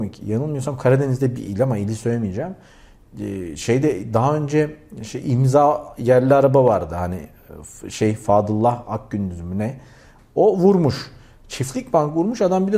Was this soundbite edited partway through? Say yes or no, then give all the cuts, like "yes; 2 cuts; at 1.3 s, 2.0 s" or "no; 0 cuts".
no; 0 cuts